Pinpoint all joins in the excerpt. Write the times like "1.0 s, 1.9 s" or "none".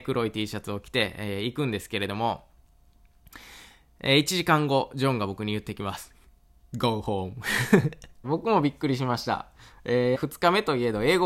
8.2 s, 10.1 s